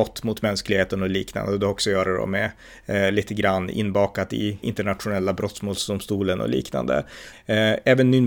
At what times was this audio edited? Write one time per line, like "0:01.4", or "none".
0:04.6
0:07.3

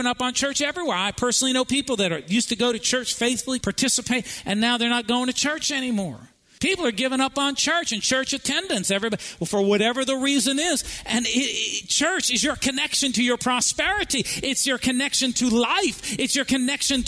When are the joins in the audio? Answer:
0:03.6

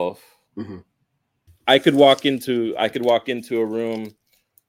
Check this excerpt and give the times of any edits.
0:01.5

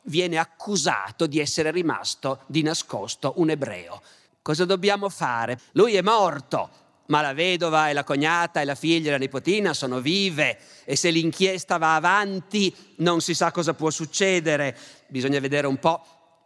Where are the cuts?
0:04.3
0:05.6
0:15.0

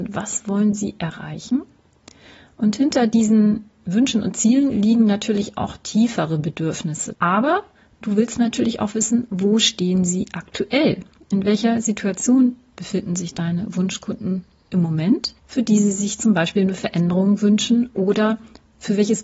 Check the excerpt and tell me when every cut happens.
0:07.1
0:15.4

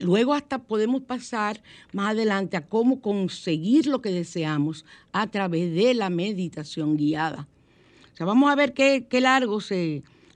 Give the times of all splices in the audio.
none

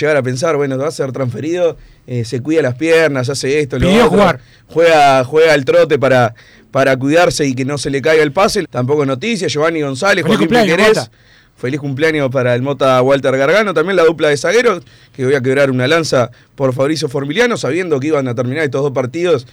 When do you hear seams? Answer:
0:08.6

